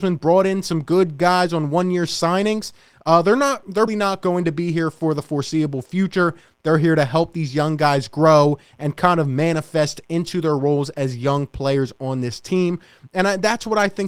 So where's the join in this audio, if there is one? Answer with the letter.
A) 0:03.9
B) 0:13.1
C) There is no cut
A